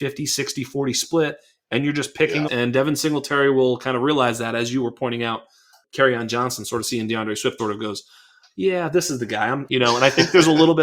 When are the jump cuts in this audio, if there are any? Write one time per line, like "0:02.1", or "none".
0:02.5
0:07.6
0:09.7